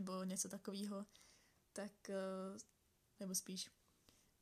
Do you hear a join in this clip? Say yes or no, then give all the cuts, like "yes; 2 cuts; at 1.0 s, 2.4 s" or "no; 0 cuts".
yes; 1 cut; at 3.2 s